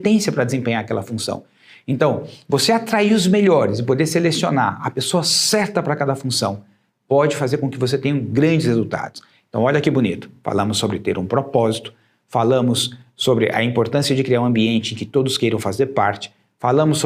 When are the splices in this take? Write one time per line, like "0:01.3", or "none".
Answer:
none